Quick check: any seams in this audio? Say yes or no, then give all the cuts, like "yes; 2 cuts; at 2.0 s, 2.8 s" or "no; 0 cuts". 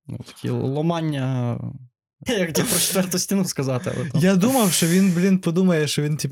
yes; 1 cut; at 2.3 s